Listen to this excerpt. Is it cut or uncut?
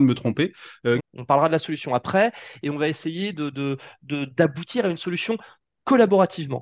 cut